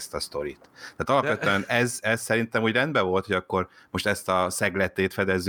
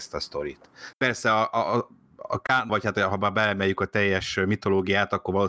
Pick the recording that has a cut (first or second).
second